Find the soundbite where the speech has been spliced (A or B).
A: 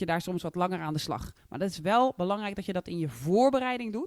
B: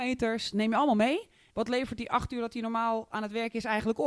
B